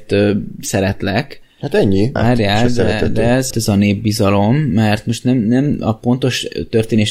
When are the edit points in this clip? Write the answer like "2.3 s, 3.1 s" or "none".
2.2 s, 3.5 s